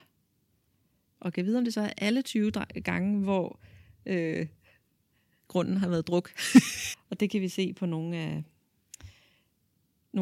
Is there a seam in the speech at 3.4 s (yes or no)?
no